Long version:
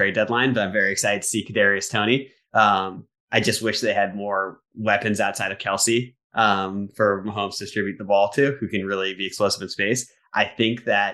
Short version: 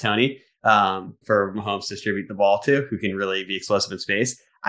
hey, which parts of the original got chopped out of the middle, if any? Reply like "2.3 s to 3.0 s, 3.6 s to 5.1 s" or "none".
3.1 s to 6.9 s